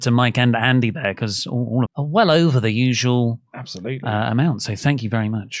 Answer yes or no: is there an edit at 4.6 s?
no